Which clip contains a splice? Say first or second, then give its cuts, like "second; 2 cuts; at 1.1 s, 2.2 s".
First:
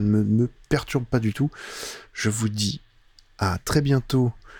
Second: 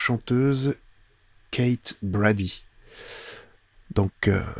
first; 1 cut; at 2.1 s